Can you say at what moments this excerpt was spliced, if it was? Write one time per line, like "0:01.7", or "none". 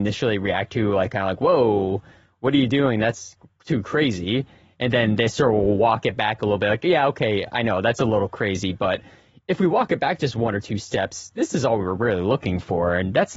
none